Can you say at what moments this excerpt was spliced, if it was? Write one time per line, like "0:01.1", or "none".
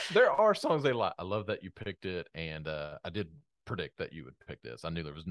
0:01.1
0:03.0